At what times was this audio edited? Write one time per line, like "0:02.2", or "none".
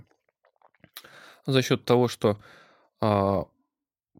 none